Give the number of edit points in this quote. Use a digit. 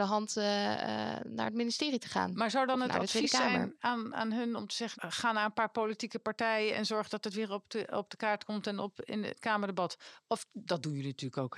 1